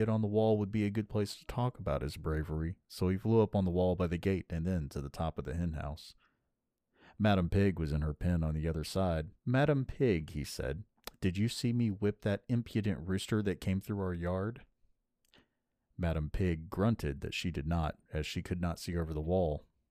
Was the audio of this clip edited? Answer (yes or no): yes